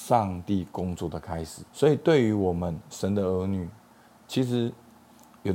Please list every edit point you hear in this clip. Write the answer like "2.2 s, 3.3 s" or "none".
1.7 s